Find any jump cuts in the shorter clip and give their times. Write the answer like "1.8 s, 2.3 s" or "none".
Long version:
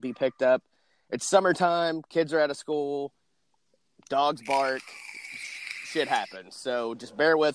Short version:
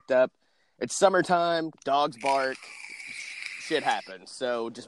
1.7 s